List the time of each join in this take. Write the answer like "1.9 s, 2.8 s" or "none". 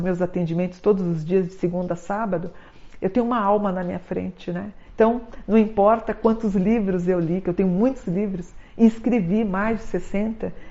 4.9 s